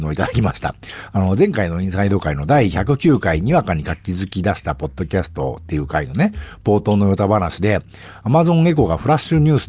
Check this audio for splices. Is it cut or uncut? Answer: uncut